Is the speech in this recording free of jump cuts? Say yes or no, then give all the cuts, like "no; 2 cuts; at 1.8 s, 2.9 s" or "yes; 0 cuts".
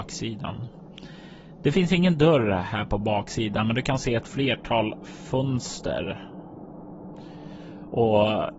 yes; 0 cuts